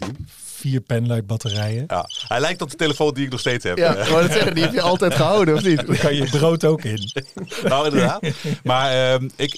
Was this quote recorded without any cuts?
yes; 0 cuts

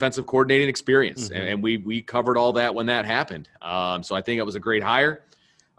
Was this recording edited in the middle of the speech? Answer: no; 0 cuts

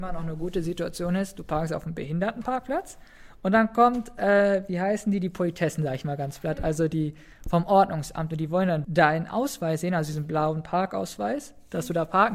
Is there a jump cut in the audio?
yes; 1 cut; at 8.8 s

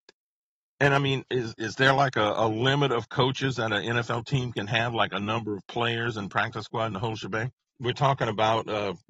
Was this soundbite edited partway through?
yes; 2 cuts; at 1.6 s, 7.7 s

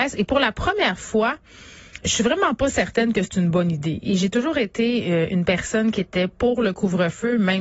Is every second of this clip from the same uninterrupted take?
no; 1 cut; at 2.0 s

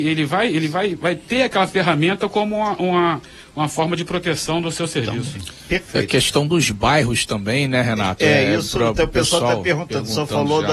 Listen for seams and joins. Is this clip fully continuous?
yes; 0 cuts

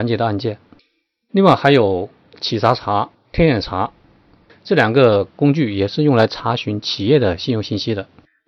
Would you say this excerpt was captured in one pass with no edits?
yes; 0 cuts

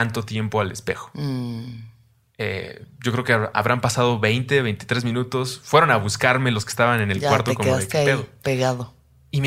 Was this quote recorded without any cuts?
yes; 0 cuts

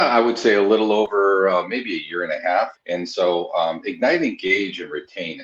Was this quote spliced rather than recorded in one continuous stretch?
yes; 1 cut; at 2.7 s

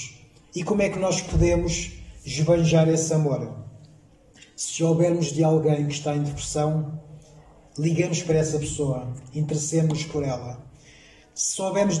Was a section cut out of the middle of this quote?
no; 0 cuts

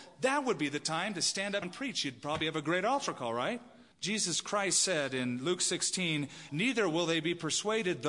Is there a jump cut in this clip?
yes; 3 cuts; at 1.6 s, 3.9 s, 6.5 s

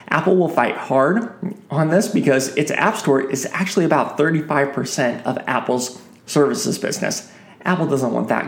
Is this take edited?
no; 0 cuts

